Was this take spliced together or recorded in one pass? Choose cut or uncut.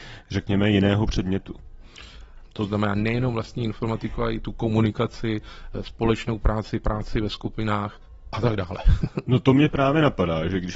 cut